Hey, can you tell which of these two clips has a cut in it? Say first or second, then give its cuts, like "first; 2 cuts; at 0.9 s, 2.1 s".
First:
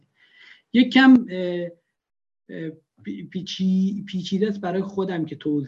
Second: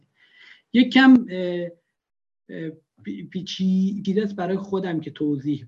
second; 1 cut; at 4.0 s